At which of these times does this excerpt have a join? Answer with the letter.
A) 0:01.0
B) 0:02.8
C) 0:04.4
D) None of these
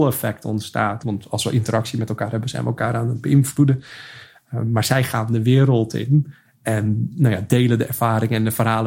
A